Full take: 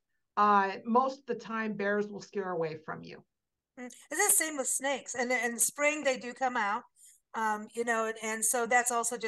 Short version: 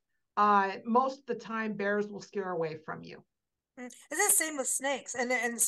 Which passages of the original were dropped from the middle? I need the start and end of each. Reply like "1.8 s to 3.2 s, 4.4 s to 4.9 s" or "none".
none